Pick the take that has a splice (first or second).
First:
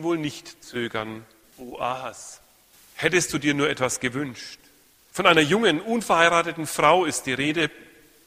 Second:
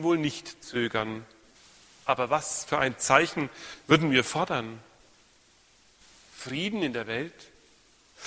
first